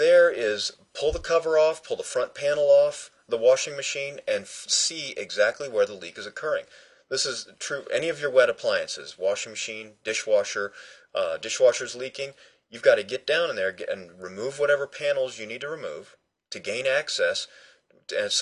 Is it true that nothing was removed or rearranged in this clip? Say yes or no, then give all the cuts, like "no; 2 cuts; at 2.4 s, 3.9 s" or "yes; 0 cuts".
yes; 0 cuts